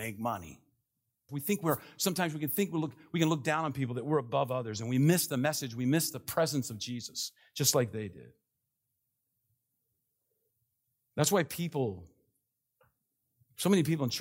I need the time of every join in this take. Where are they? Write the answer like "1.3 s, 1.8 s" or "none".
1.3 s

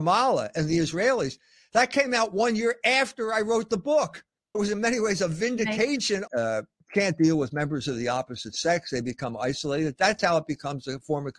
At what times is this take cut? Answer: 4.5 s, 6.3 s

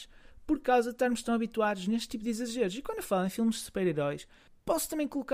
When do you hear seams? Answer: none

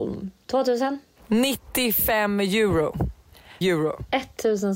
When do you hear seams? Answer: 3.6 s

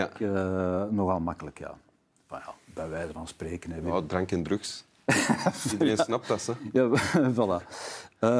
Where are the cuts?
none

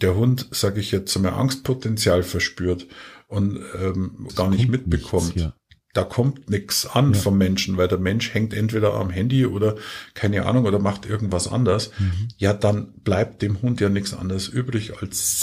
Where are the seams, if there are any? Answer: 4.3 s

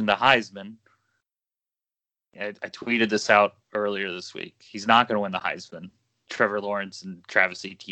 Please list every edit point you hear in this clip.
none

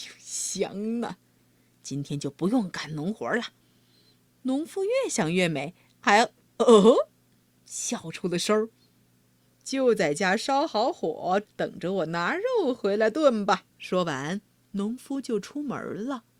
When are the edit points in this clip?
9.2 s, 11.5 s, 13.7 s

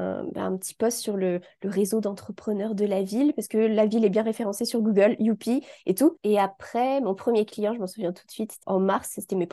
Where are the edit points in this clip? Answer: 6.2 s, 8.6 s

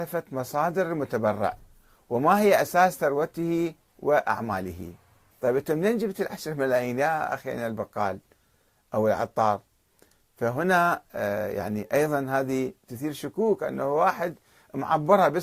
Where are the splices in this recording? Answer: 5.3 s

